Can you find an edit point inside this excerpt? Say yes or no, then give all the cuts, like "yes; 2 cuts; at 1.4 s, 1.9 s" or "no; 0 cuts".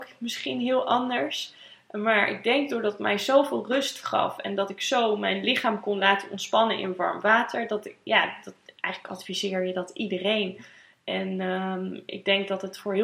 no; 0 cuts